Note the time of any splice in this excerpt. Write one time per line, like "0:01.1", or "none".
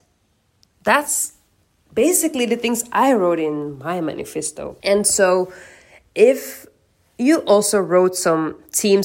0:04.8